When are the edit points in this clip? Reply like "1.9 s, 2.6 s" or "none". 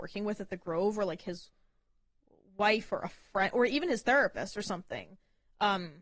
none